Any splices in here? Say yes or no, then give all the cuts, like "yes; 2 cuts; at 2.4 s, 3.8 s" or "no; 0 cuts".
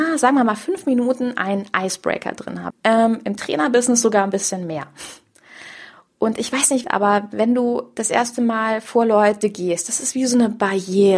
yes; 2 cuts; at 2.7 s, 6.8 s